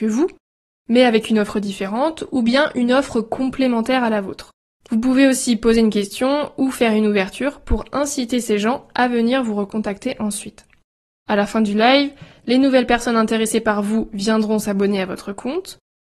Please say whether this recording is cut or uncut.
cut